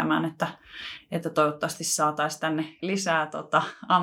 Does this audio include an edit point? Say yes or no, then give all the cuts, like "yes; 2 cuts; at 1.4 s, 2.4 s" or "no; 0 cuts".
yes; 1 cut; at 2.8 s